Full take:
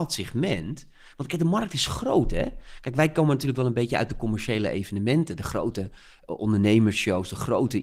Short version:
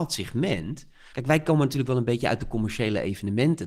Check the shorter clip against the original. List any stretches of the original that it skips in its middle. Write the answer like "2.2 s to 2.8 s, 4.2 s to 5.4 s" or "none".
1.1 s to 2.8 s